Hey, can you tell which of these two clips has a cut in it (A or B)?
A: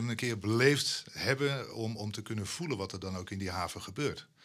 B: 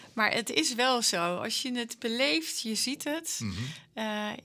B